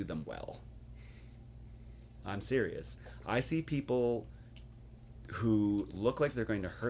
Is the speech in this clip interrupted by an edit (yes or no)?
no